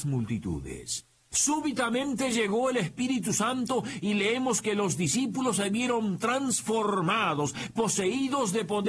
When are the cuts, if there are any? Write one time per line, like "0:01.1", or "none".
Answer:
0:01.3